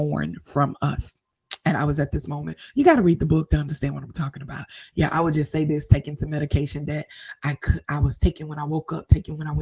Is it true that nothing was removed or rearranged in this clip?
yes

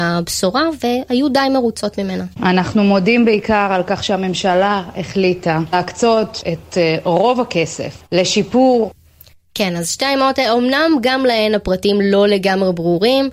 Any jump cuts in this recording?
yes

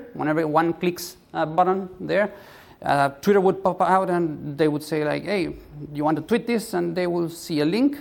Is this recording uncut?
yes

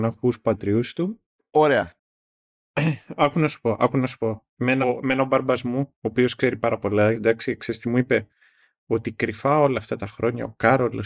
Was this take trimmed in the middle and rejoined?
yes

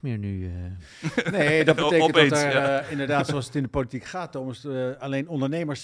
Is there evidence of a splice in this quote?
no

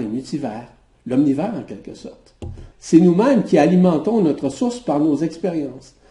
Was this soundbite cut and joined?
yes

